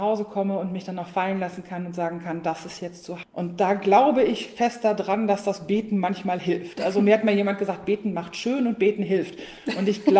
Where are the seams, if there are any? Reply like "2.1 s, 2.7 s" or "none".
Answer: 3.2 s